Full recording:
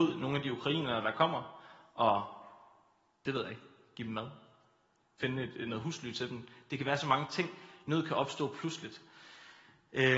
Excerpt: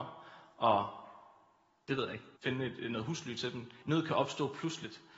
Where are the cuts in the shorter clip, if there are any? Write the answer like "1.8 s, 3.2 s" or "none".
2.4 s, 3.8 s